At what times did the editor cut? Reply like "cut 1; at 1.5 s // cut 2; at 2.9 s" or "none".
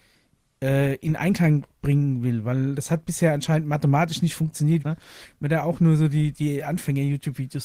cut 1; at 4.8 s